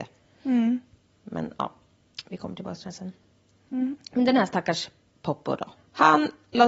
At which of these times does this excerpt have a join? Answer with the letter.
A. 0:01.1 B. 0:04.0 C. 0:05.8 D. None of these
C